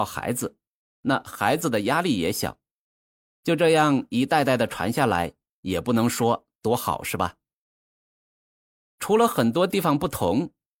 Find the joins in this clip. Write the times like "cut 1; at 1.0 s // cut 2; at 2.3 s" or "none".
none